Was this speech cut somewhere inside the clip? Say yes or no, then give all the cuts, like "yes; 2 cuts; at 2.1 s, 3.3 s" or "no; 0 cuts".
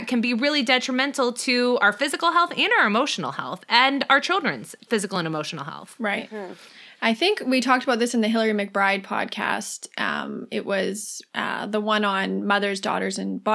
no; 0 cuts